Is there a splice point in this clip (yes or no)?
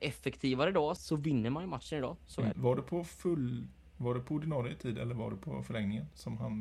yes